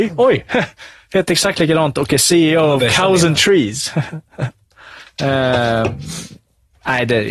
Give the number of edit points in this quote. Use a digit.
0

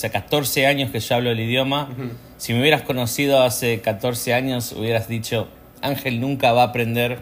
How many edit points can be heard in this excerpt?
0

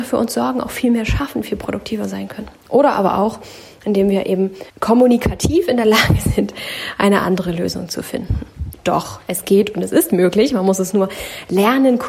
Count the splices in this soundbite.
2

